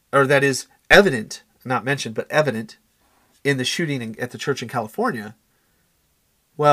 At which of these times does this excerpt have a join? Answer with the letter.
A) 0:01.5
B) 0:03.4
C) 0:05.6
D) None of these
D